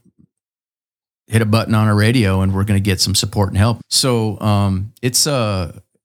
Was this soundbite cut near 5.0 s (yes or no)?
no